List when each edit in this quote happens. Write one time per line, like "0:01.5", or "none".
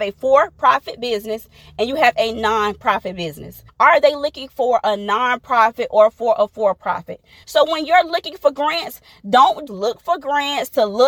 0:03.7
0:07.4
0:09.7

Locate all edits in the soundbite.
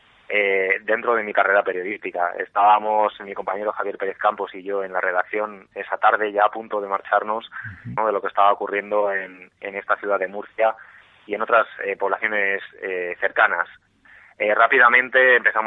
0:08.0

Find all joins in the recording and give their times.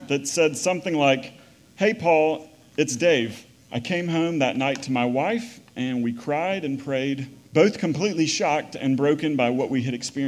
0:03.6
0:07.4

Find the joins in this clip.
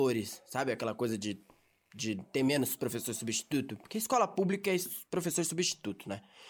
none

